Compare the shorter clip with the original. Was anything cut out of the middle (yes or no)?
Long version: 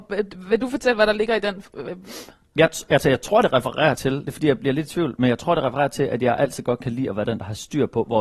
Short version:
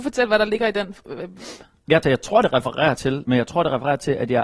yes